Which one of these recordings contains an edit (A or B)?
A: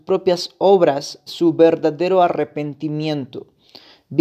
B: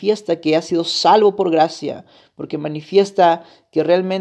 A